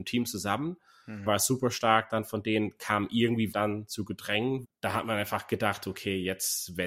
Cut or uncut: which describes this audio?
cut